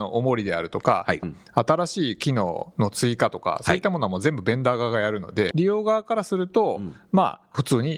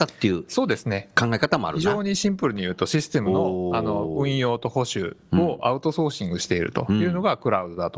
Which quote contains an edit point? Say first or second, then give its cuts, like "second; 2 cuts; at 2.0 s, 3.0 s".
first; 2 cuts; at 1.2 s, 5.5 s